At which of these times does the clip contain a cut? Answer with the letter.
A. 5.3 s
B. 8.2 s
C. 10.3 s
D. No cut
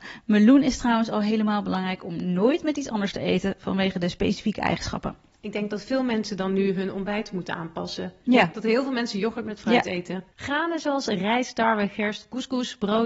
C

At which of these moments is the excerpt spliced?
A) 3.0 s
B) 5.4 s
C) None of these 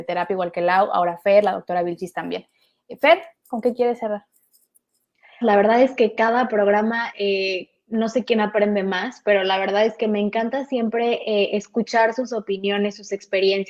B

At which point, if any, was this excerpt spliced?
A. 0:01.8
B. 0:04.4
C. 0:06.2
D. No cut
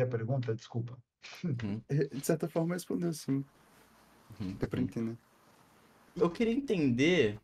C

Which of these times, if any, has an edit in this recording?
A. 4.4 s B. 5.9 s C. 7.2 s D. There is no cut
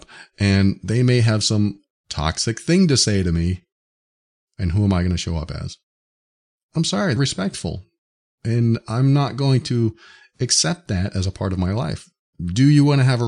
C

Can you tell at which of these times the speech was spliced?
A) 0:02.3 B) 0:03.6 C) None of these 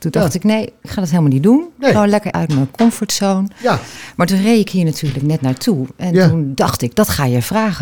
A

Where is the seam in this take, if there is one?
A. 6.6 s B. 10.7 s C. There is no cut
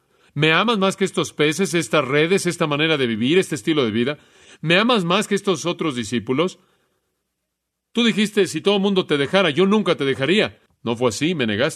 B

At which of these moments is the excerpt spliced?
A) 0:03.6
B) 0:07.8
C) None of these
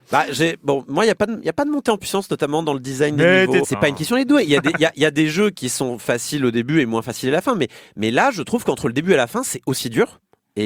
A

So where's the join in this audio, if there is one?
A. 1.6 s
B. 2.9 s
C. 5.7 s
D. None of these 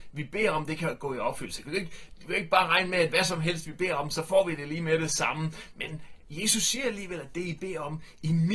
A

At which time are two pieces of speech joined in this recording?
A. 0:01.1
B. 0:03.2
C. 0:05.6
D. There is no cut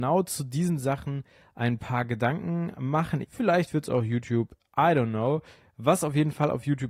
B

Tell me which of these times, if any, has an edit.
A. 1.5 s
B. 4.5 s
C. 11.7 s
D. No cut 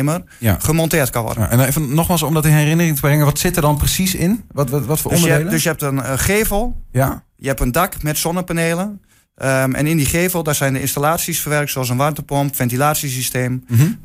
D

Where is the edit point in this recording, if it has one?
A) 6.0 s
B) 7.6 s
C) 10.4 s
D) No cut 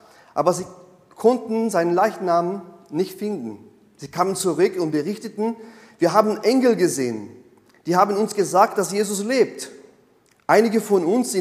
D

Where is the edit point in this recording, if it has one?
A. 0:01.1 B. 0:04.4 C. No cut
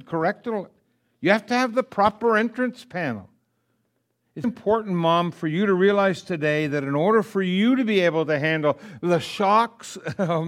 B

